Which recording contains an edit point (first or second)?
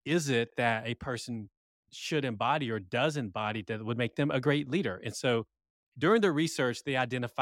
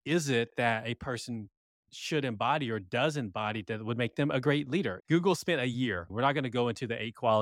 second